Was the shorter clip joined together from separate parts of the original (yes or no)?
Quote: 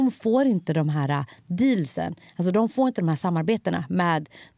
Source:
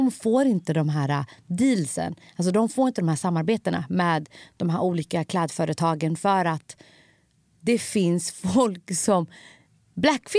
no